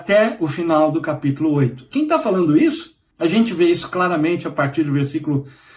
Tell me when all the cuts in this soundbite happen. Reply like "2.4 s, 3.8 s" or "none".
1.9 s, 3.1 s